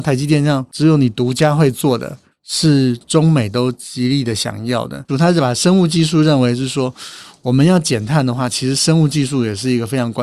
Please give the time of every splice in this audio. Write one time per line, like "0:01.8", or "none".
0:02.3
0:05.1